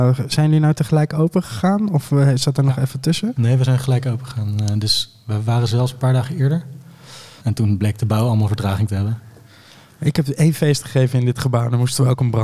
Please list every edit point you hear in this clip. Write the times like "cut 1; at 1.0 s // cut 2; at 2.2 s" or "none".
cut 1; at 7.4 s // cut 2; at 10.0 s